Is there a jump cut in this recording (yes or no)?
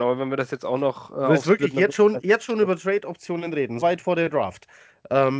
yes